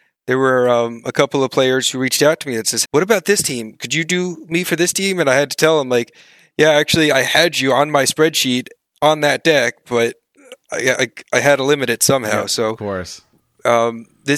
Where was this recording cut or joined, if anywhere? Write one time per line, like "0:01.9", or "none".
0:02.8